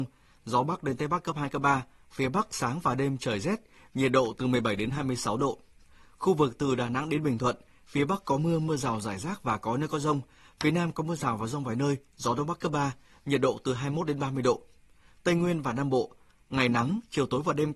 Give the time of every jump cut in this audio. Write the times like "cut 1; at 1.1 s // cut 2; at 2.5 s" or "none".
none